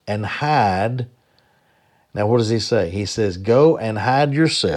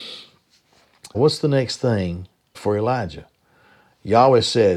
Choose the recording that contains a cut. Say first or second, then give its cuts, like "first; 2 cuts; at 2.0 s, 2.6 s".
second; 2 cuts; at 1.1 s, 2.5 s